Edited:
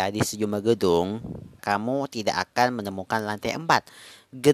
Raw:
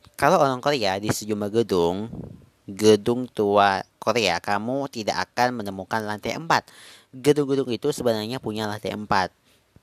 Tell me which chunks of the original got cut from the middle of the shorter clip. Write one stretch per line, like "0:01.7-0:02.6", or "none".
0:02.5-0:04.4